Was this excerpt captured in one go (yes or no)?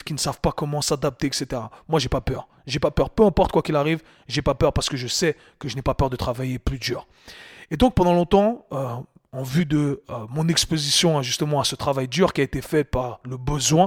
yes